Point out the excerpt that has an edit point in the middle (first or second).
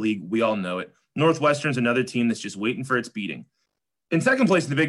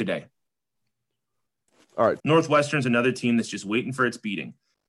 second